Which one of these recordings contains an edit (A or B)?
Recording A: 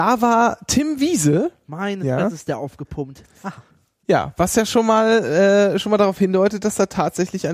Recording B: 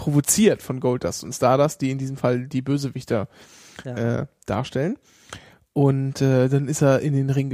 A